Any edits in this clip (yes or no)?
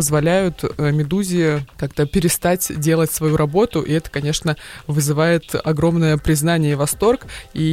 no